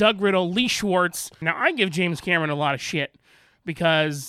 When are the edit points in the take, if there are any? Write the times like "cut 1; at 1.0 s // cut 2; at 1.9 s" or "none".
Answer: cut 1; at 1.4 s